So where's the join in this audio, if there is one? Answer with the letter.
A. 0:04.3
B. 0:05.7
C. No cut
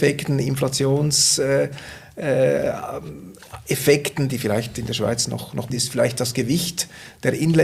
B